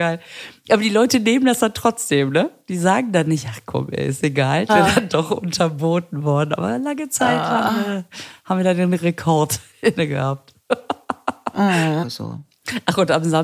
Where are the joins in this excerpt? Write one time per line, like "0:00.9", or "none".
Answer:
0:04.7
0:12.0